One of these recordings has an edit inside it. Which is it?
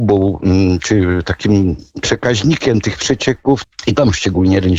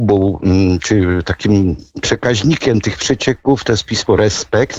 first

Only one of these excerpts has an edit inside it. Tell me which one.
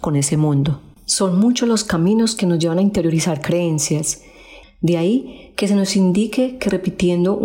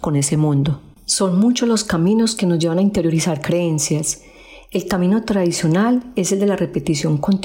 first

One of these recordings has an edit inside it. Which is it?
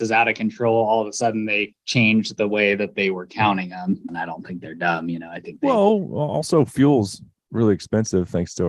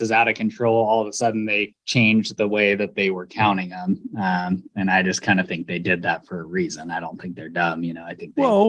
first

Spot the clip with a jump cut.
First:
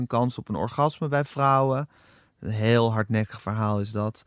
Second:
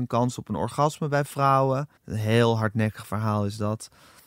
second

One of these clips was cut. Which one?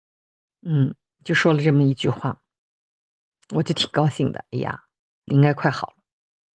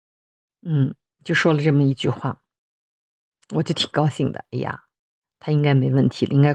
first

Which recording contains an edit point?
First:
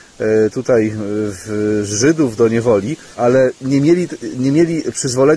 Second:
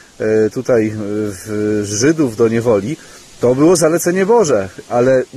first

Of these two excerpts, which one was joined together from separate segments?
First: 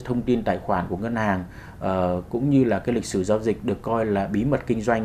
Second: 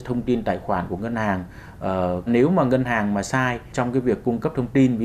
second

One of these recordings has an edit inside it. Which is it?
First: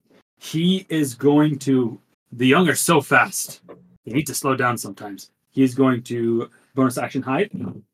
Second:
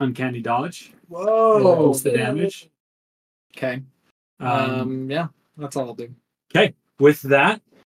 first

